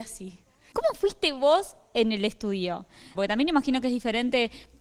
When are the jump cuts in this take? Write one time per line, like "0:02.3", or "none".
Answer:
0:03.2